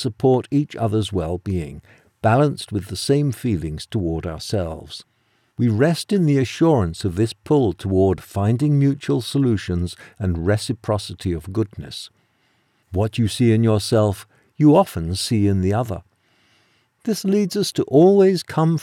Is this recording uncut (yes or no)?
no